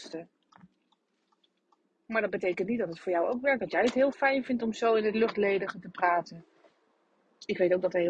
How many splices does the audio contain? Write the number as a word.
zero